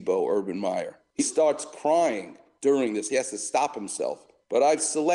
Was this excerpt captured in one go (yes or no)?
no